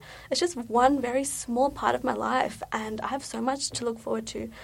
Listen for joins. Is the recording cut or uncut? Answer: uncut